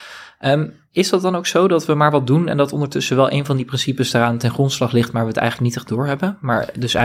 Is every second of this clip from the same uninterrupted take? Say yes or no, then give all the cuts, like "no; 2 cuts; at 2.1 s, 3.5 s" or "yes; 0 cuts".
yes; 0 cuts